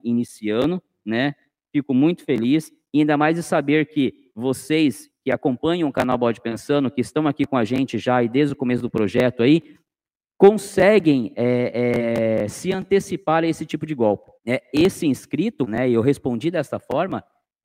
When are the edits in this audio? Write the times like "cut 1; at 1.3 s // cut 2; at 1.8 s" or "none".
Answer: cut 1; at 14.4 s // cut 2; at 15.7 s